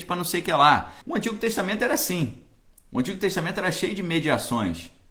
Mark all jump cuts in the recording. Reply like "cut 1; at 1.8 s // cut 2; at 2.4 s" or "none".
cut 1; at 1.0 s